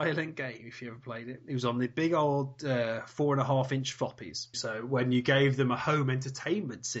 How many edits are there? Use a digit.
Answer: 1